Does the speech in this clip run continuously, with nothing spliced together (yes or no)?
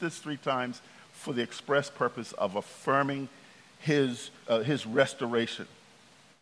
no